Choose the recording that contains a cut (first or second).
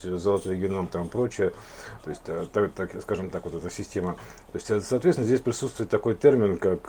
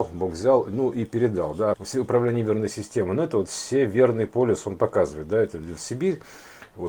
second